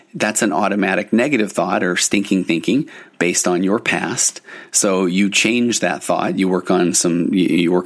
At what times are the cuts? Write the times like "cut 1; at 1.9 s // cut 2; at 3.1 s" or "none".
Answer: none